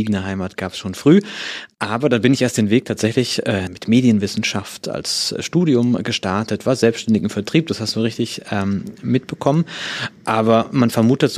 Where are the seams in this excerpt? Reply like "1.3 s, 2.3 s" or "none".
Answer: 3.7 s